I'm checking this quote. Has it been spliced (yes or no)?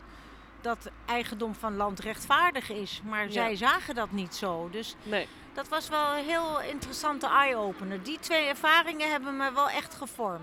no